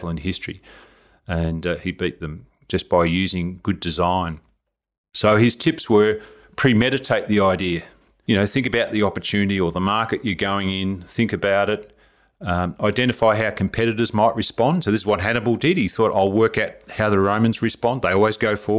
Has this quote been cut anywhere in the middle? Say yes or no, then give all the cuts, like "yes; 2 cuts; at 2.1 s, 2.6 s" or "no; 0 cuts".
no; 0 cuts